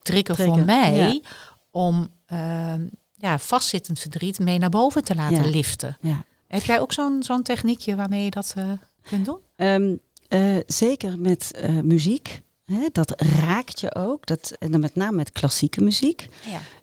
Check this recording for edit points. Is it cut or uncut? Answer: uncut